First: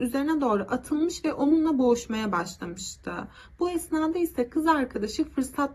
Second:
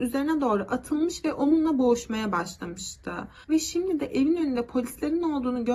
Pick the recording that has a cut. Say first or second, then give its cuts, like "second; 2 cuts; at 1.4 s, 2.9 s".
second; 1 cut; at 3.4 s